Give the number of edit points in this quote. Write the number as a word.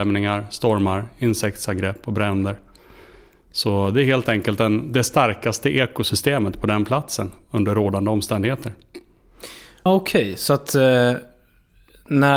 one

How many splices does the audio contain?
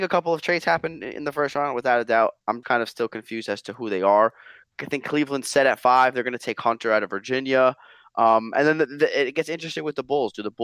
one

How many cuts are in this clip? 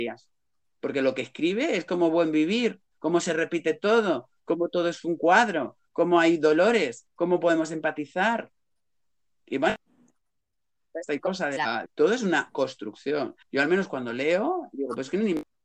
two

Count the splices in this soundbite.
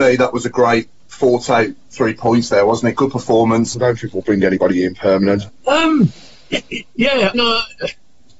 three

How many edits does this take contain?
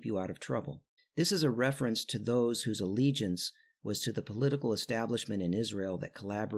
one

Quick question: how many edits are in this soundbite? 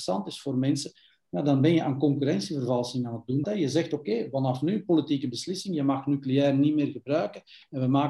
one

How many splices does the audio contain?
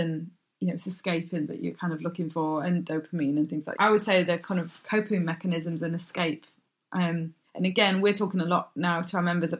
one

